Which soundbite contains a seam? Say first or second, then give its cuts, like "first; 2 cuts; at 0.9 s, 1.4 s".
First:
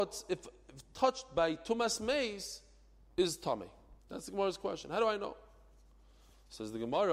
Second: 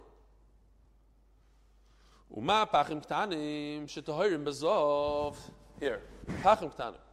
first; 1 cut; at 4.0 s